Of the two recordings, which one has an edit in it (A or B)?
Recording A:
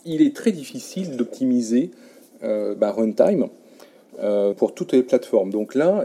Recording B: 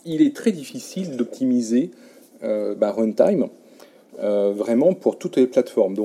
A